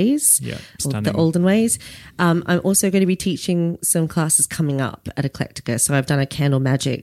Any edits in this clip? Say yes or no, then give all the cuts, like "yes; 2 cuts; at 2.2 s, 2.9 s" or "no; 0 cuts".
no; 0 cuts